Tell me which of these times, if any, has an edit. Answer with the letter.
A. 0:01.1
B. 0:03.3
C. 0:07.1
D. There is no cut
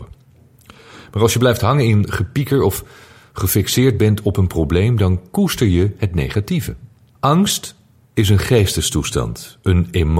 C